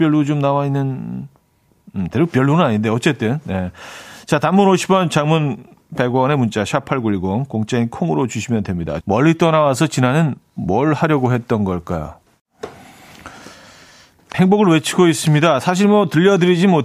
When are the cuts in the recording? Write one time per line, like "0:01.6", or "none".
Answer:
0:09.0
0:14.3